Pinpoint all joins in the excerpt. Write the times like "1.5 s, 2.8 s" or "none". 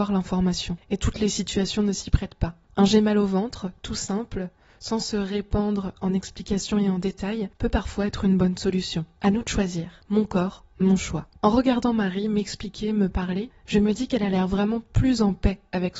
none